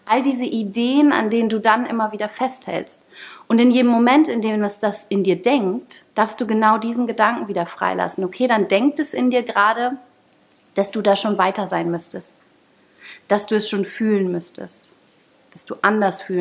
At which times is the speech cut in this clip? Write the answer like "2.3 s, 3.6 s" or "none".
6.1 s